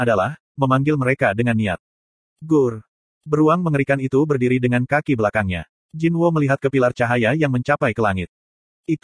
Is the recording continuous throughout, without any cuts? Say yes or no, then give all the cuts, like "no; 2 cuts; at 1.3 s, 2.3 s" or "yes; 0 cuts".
no; 2 cuts; at 2.2 s, 5.7 s